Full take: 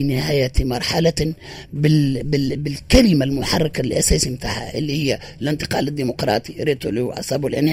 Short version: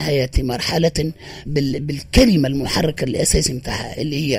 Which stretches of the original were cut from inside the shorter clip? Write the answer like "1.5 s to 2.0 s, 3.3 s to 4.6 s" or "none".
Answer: 1.7 s to 2.2 s

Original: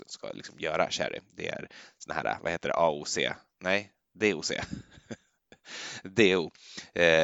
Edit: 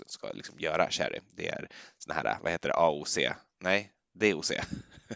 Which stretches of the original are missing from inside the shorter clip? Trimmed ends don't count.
none

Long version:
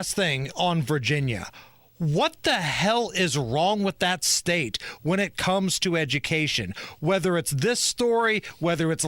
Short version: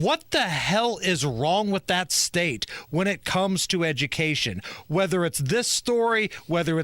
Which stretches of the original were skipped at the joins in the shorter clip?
none

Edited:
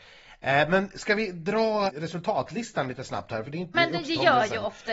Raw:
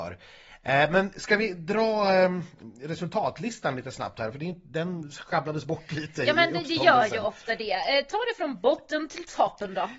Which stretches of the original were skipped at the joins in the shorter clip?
2.1 s to 2.7 s, 4.6 s to 6.3 s

